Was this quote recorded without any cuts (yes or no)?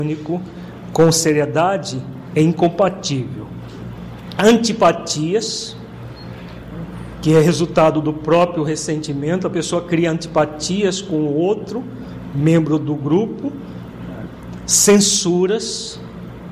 yes